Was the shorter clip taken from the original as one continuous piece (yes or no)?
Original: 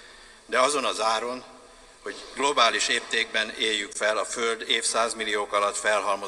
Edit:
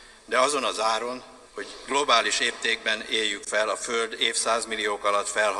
no